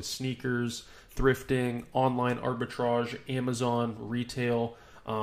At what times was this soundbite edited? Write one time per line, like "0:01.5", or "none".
0:01.1

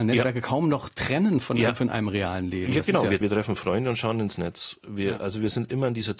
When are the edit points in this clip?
0:03.2

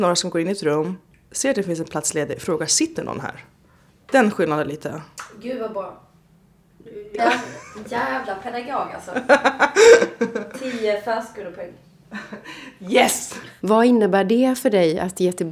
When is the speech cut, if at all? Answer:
0:07.2
0:13.6

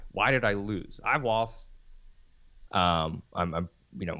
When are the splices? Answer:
0:02.7

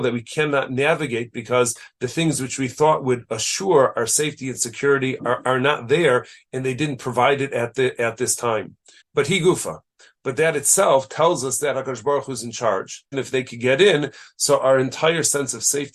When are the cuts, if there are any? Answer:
0:05.2
0:09.0
0:13.1

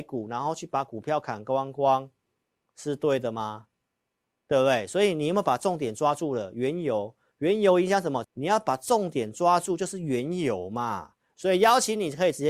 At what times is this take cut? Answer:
0:08.2
0:11.3

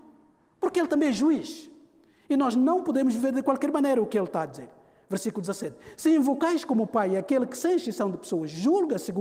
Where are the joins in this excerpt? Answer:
none

